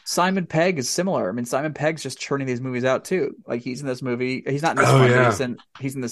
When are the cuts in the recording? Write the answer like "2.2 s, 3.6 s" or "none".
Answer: none